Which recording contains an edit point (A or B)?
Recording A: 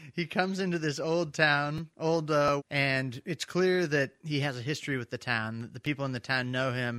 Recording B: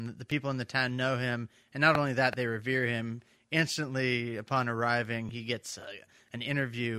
A